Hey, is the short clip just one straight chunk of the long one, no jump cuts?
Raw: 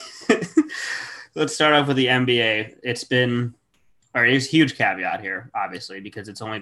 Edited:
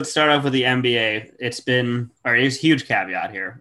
no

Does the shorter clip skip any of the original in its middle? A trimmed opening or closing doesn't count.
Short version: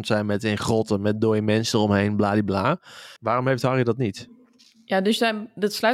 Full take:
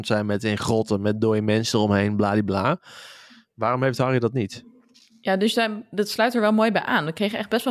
yes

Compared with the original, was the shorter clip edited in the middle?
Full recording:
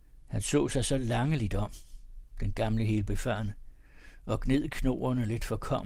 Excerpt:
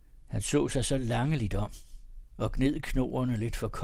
yes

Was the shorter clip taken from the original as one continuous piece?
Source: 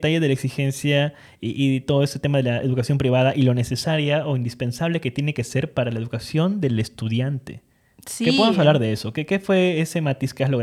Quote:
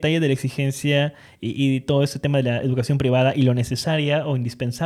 yes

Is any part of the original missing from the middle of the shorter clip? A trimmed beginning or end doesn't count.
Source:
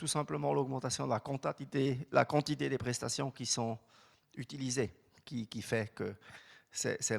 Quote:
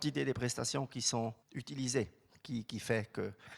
yes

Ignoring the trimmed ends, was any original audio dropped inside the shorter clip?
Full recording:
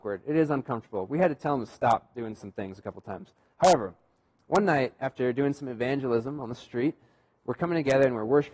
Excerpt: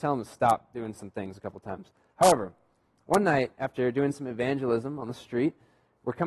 no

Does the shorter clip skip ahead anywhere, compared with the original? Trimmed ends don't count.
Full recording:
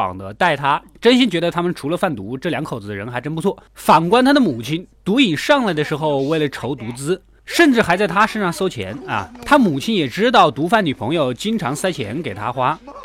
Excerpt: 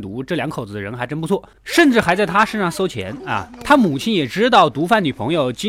yes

